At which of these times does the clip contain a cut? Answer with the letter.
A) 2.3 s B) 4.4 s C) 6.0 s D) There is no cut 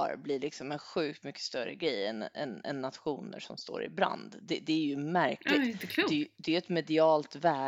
D